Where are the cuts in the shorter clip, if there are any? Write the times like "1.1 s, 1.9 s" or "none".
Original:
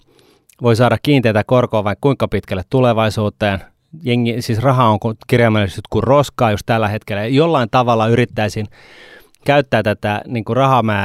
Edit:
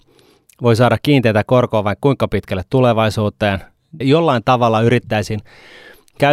4.0 s